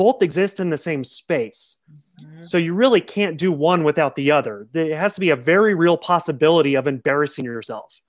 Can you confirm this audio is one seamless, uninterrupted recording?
yes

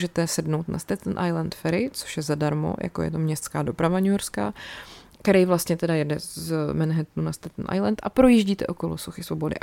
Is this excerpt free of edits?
yes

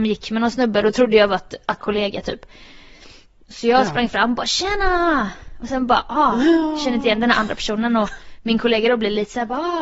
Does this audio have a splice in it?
yes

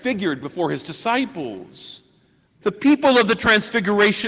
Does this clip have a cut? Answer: yes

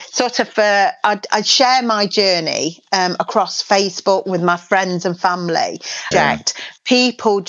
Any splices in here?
yes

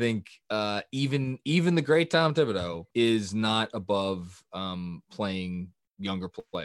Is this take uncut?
no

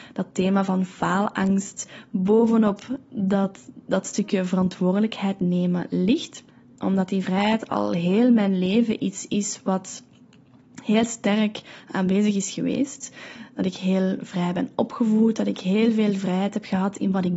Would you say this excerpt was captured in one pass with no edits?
no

